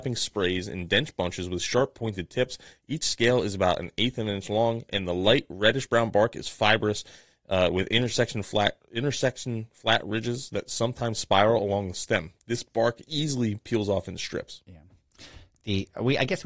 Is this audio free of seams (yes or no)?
yes